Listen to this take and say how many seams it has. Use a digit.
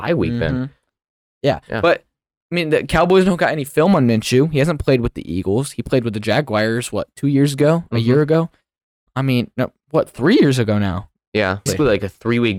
1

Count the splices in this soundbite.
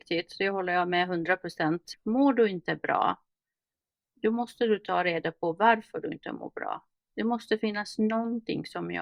0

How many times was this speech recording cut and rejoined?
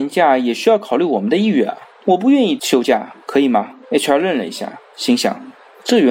2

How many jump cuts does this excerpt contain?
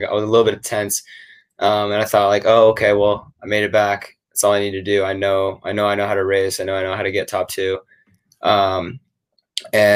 0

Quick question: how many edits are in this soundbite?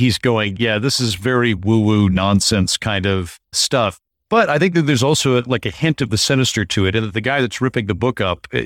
0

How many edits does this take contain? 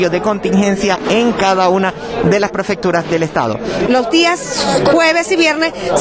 1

